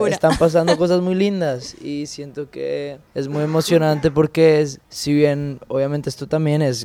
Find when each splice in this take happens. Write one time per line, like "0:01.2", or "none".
0:03.1
0:04.8